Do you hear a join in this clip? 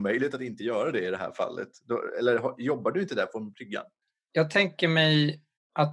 no; 0 cuts

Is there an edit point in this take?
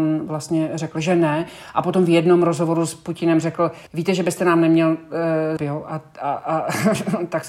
yes; 2 cuts; at 3.9 s, 5.6 s

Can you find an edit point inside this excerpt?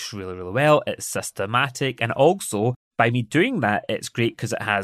yes; 1 cut; at 2.8 s

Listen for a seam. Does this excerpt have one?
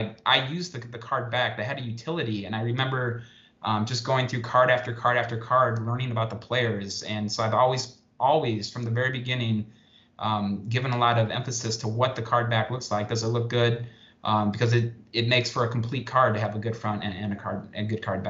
no; 0 cuts

